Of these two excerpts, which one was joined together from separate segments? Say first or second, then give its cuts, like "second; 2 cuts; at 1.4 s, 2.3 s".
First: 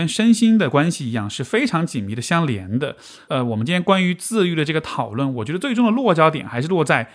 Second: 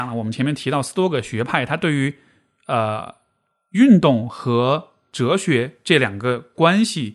first; 1 cut; at 3.3 s